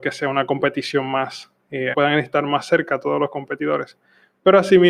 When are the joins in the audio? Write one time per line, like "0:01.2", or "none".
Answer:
0:01.9